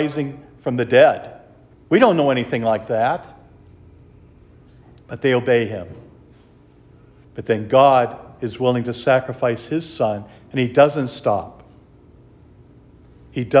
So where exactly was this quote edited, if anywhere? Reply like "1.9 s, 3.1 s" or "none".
1.7 s, 7.2 s